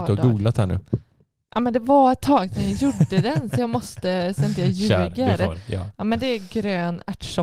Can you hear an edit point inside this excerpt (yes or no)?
no